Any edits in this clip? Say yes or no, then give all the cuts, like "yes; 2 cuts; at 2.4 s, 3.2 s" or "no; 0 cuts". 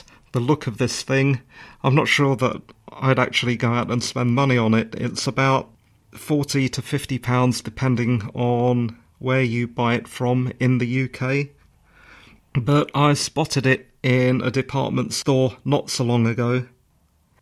no; 0 cuts